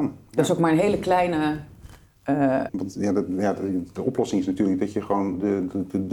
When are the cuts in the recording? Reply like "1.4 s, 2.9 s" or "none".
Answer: 2.7 s